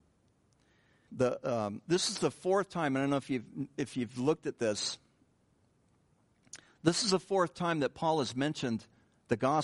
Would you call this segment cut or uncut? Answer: cut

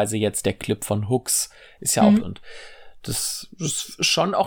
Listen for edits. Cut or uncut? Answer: cut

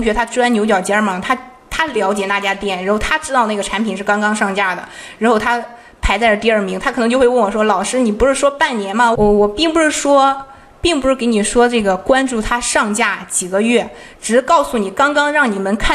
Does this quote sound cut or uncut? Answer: cut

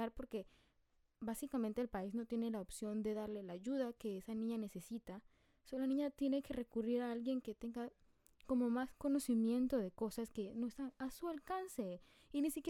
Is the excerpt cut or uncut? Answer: uncut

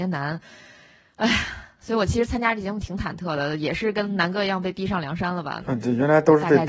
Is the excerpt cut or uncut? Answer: cut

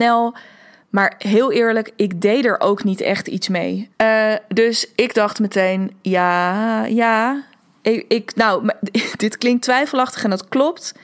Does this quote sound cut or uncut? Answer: cut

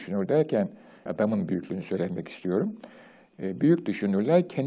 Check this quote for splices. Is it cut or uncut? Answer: cut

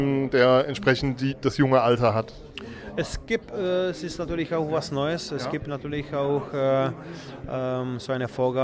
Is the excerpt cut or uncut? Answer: uncut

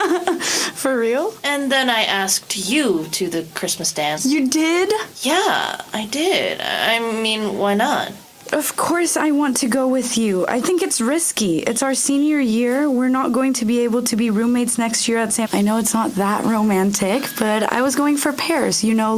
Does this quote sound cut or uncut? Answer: cut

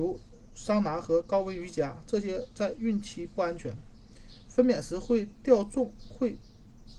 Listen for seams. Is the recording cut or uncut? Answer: uncut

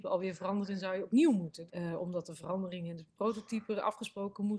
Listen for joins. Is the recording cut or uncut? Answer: cut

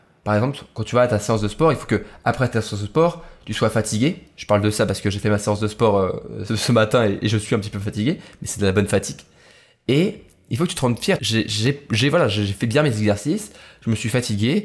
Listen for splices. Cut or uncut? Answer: cut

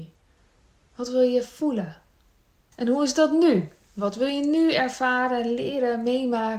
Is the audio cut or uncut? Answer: cut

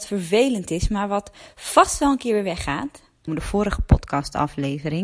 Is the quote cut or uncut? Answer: cut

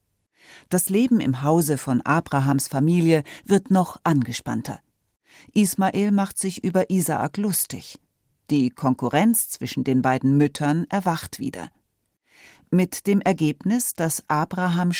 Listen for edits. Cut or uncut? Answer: uncut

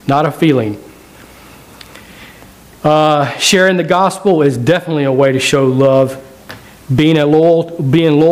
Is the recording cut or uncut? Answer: uncut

